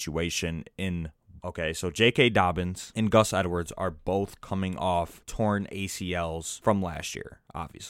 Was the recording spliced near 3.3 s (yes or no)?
no